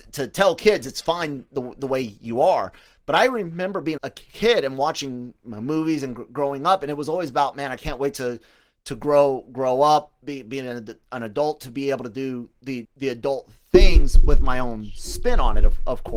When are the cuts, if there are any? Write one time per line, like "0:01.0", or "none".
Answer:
0:04.0
0:12.8